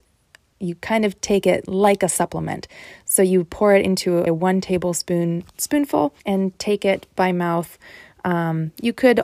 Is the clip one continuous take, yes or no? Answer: no